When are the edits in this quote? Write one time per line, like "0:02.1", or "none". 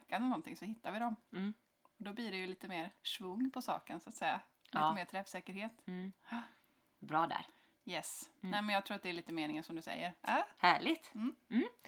0:03.0
0:10.2